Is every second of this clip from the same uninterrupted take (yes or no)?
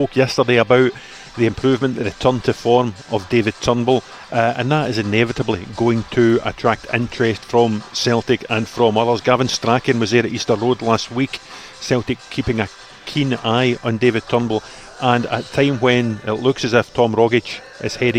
yes